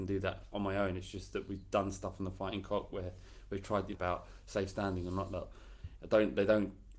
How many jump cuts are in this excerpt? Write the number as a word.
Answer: two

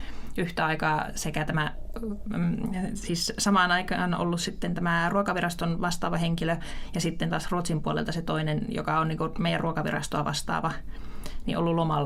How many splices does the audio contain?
zero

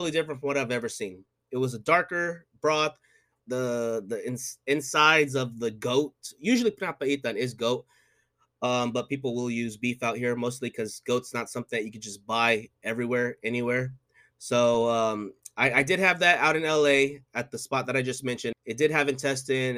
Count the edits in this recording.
two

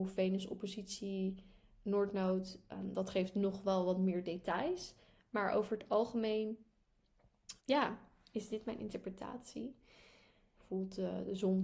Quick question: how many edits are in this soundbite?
two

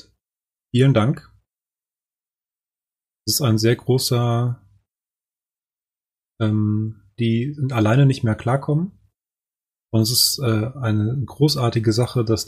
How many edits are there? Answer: one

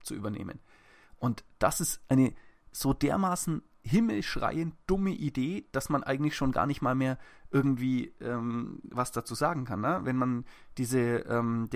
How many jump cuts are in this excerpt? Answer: zero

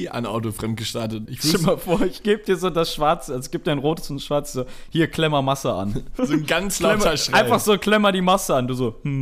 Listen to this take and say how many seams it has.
two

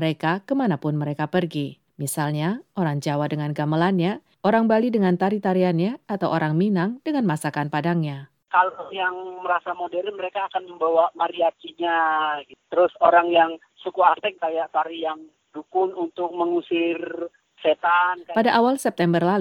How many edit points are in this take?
two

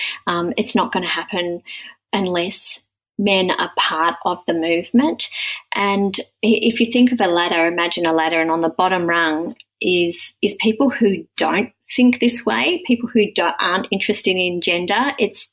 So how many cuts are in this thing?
zero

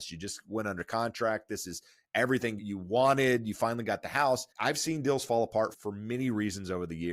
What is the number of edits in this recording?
one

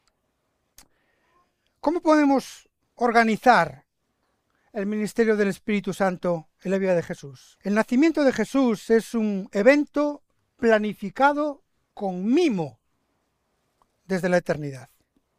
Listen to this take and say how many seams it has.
one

